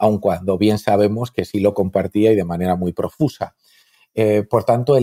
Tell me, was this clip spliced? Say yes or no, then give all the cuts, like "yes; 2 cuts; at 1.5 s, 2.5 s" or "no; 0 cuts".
no; 0 cuts